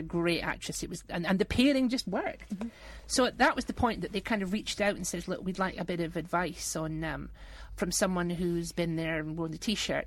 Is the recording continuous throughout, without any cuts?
yes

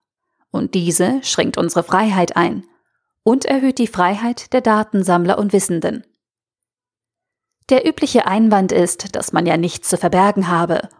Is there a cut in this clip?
no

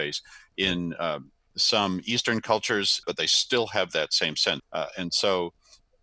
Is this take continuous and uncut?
no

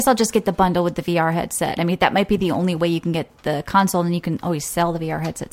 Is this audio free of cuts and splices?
yes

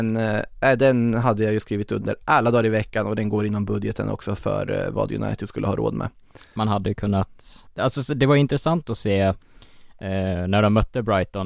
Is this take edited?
yes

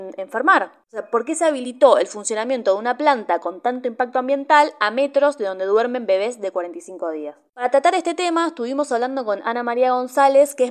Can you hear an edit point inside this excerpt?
no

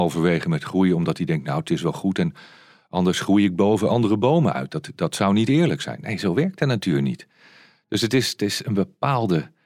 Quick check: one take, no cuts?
yes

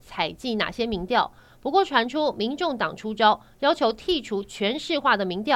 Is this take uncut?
yes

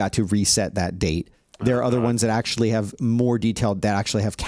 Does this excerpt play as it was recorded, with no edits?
yes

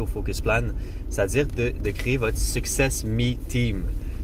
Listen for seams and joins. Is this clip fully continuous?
yes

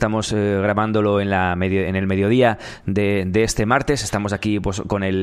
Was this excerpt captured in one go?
yes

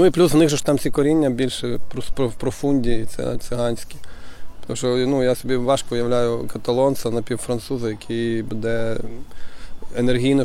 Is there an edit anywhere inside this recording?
no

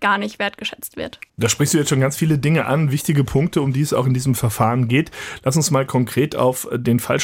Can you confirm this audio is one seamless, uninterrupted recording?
no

